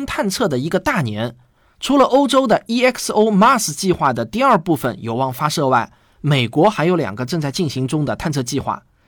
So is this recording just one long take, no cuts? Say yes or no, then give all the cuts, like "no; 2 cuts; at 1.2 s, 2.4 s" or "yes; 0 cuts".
yes; 0 cuts